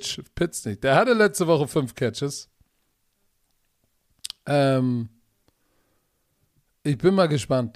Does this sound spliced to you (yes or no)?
no